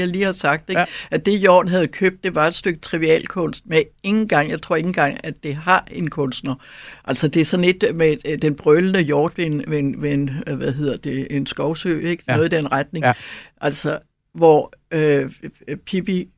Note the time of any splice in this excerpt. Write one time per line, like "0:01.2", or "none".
none